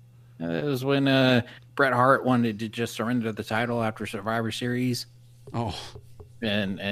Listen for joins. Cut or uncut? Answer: cut